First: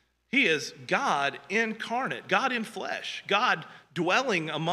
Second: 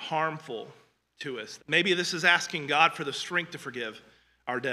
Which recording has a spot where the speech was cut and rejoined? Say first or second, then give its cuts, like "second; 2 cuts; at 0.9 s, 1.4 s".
second; 1 cut; at 1.6 s